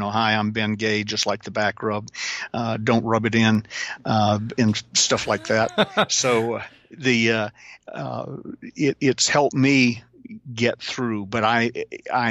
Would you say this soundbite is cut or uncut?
uncut